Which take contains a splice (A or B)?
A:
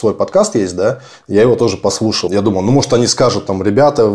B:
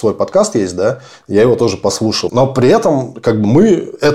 B